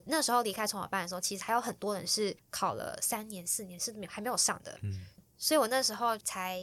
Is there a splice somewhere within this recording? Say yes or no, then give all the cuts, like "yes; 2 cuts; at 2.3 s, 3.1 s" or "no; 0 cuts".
no; 0 cuts